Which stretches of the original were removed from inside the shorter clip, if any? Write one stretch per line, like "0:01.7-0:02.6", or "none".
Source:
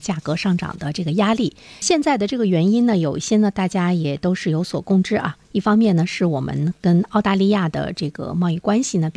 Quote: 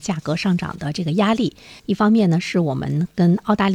0:01.8-0:05.5

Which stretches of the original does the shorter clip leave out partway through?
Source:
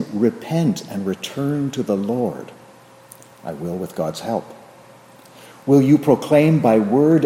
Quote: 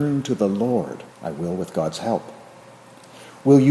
0:02.6-0:03.3

